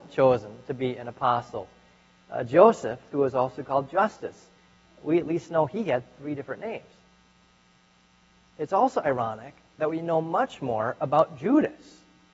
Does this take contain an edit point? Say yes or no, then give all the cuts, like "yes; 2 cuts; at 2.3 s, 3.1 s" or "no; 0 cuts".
yes; 1 cut; at 3.1 s